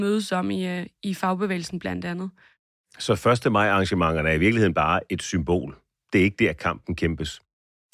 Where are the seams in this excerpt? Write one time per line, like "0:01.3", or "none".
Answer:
none